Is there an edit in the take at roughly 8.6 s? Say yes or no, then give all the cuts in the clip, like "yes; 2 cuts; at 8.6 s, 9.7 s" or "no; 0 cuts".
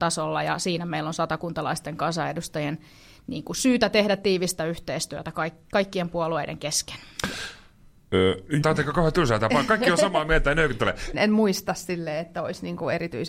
yes; 2 cuts; at 8.6 s, 11.1 s